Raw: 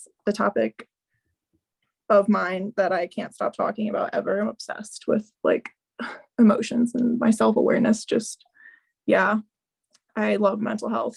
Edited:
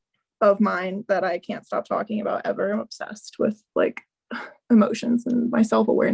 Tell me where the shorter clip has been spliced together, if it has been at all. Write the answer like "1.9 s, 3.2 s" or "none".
none